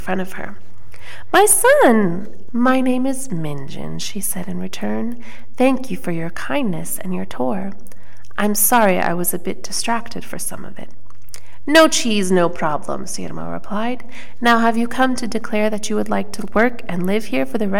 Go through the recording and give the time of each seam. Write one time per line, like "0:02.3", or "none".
0:02.5